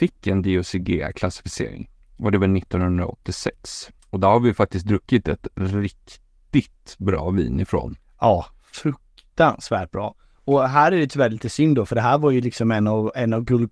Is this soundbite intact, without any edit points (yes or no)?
no